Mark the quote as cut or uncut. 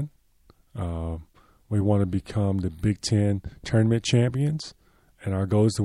uncut